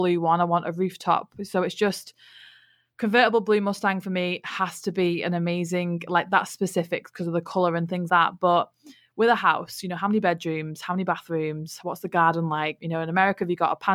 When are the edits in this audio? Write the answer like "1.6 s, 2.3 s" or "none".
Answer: 8.1 s, 12.8 s